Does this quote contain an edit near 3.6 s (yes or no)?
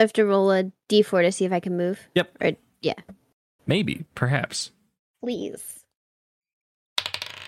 yes